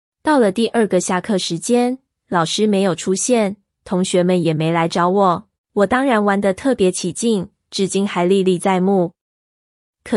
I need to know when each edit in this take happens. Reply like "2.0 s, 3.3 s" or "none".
5.6 s